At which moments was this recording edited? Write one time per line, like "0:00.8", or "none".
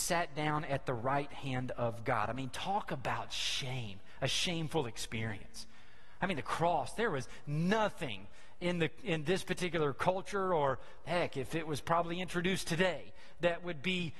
none